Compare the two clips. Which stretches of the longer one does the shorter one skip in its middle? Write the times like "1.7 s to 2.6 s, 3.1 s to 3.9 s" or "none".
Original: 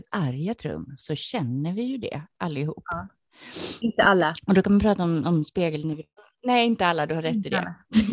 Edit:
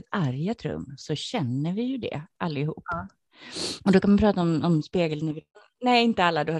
3.8 s to 4.4 s